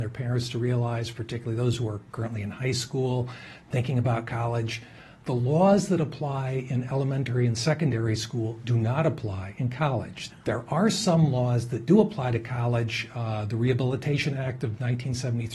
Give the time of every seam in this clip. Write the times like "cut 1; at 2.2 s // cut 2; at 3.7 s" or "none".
cut 1; at 10.3 s